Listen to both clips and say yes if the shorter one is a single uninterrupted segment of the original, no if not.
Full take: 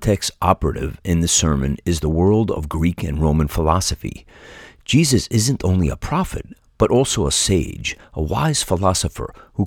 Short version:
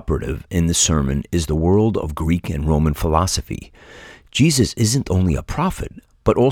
yes